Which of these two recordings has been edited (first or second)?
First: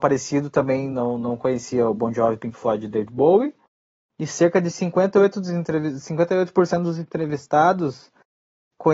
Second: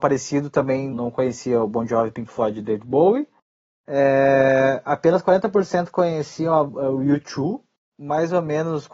second